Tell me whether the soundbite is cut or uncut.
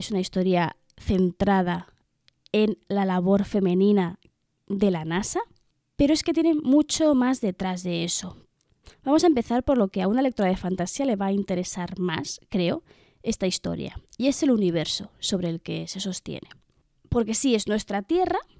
uncut